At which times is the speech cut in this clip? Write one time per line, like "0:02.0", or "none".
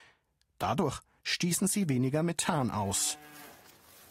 0:01.2